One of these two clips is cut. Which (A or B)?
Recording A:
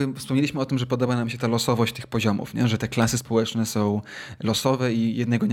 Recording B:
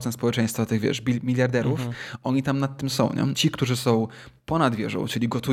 B